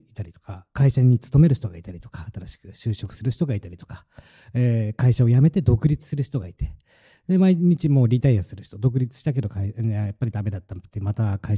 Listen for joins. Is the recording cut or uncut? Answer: uncut